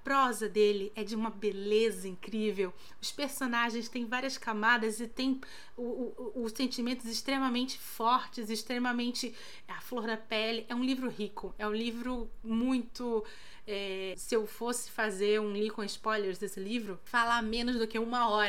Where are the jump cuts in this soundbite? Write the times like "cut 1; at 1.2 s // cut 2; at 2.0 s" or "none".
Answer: cut 1; at 14.1 s